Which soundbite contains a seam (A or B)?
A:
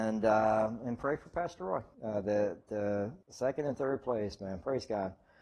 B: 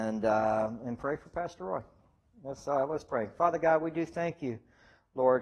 A